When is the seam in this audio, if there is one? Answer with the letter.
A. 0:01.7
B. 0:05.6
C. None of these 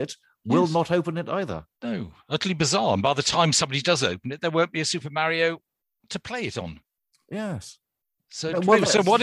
A